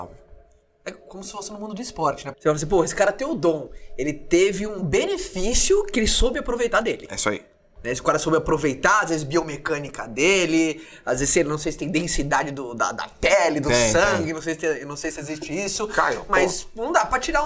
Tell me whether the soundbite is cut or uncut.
cut